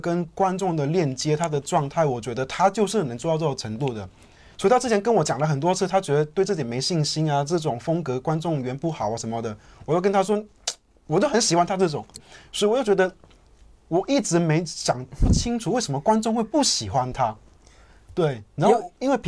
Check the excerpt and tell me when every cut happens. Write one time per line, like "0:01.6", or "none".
0:12.1